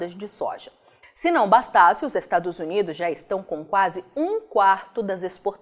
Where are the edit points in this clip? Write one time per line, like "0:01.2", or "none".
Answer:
0:01.0